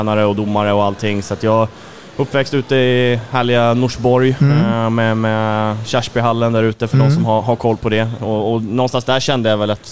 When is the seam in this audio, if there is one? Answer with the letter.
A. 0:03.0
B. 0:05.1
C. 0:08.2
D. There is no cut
C